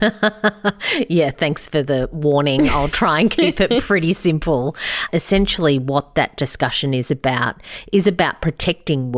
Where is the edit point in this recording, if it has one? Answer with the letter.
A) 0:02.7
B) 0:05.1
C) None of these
B